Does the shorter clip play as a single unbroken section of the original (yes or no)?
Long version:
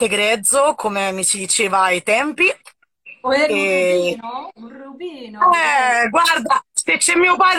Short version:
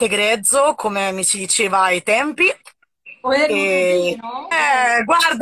no